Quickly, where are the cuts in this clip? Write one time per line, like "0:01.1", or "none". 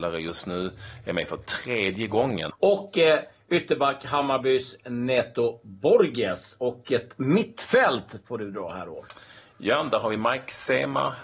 0:02.5